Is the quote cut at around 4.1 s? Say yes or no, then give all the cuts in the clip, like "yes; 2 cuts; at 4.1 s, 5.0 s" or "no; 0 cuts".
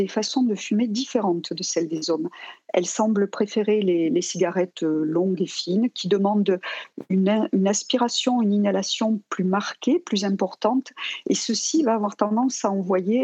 no; 0 cuts